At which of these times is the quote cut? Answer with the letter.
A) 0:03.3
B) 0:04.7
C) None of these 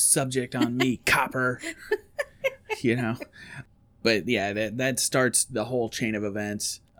C